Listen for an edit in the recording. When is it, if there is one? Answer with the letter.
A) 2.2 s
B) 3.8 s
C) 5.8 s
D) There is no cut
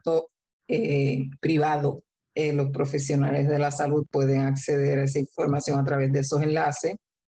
A